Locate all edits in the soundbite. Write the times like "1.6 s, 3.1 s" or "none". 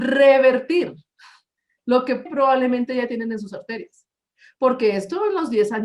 2.3 s